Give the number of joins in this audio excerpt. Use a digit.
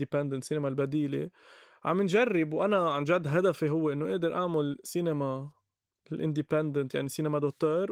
0